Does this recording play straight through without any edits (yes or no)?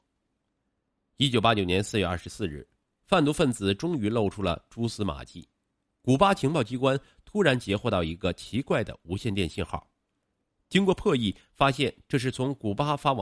yes